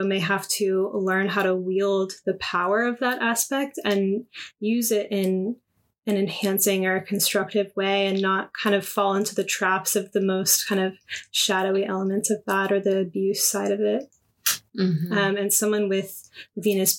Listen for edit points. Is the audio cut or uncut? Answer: cut